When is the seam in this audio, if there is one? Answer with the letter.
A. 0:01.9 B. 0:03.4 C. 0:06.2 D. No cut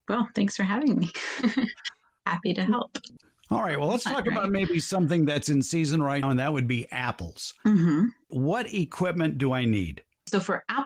C